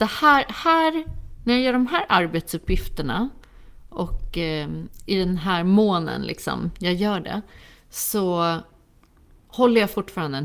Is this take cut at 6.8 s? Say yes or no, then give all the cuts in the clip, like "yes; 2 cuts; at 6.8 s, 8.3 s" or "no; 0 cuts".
no; 0 cuts